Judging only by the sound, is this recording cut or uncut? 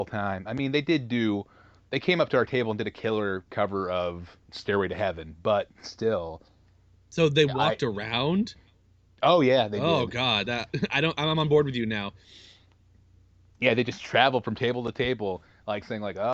uncut